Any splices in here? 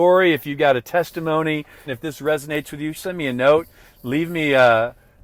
yes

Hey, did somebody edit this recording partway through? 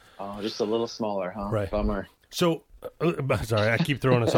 no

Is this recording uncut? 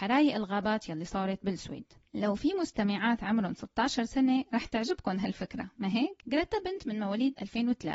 no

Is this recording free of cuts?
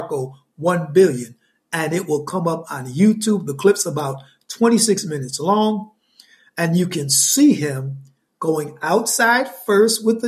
yes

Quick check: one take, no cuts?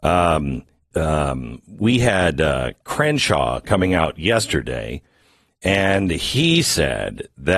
no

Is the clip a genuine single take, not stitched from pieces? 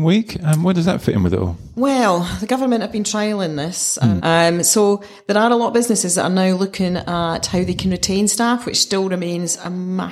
no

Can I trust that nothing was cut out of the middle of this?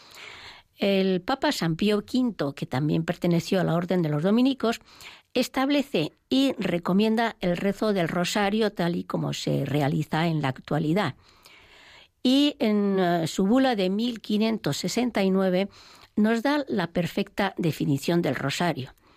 yes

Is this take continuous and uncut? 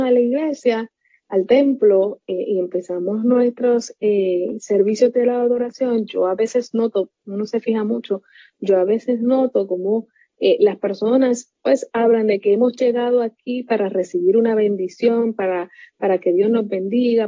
yes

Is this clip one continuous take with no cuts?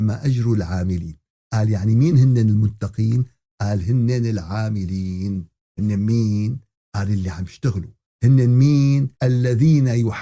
no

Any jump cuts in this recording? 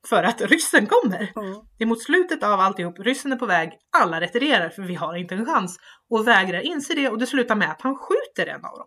no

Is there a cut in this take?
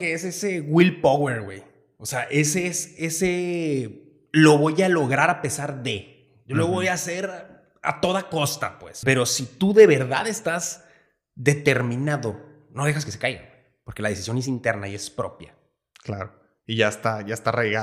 yes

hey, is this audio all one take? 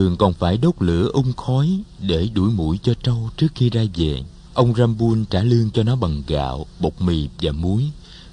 no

